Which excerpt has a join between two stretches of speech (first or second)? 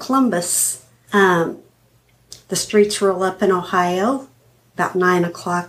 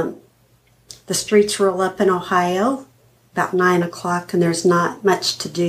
first